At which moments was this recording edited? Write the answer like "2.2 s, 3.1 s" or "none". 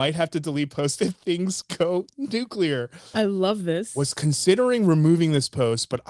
3.1 s